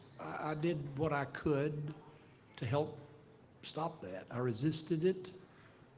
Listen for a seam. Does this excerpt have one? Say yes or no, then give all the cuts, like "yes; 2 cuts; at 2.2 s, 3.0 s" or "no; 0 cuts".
no; 0 cuts